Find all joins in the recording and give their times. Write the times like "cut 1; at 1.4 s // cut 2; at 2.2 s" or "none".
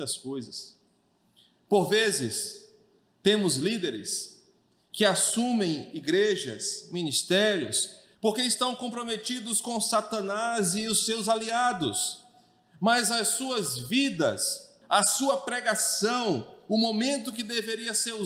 cut 1; at 8.1 s // cut 2; at 14.8 s